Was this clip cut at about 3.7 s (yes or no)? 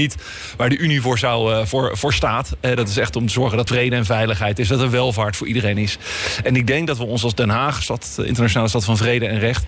yes